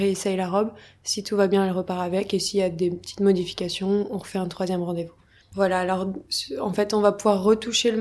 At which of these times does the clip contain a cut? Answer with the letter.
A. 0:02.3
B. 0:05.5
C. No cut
B